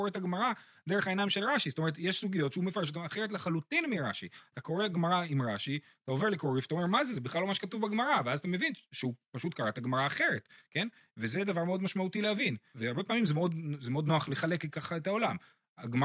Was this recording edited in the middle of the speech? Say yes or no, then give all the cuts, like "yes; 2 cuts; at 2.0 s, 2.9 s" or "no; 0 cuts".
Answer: no; 0 cuts